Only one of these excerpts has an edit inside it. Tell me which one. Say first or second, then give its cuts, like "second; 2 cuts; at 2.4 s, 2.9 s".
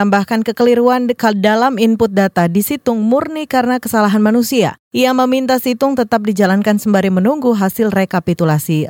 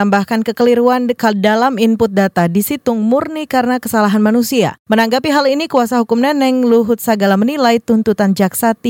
second; 1 cut; at 4.8 s